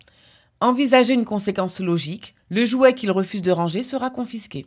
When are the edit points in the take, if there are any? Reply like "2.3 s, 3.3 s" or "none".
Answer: 2.4 s

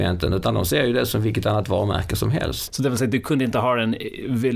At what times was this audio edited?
2.7 s

